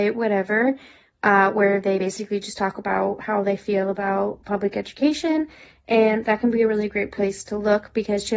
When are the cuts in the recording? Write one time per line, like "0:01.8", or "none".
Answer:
none